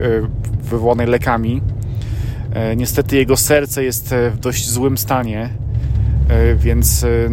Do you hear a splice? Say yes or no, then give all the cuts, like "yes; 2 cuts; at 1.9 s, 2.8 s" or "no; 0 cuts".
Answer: no; 0 cuts